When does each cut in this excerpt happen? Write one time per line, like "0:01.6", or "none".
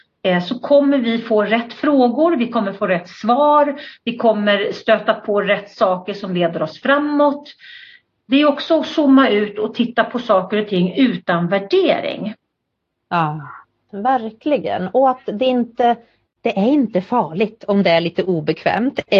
0:13.9